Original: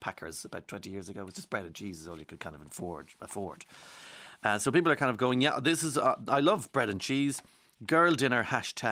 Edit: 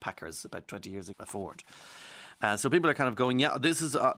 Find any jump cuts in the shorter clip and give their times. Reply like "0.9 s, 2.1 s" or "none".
1.1 s